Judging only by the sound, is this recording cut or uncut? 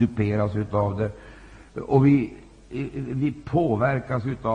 uncut